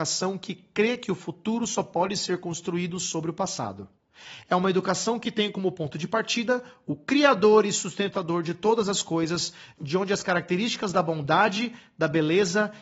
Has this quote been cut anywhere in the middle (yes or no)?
no